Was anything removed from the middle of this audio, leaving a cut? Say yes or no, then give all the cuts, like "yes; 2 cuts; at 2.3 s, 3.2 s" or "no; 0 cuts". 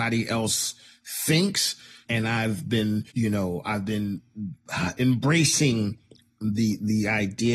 yes; 2 cuts; at 2.0 s, 3.1 s